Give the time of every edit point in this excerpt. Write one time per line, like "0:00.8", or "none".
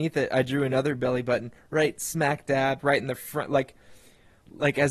0:02.8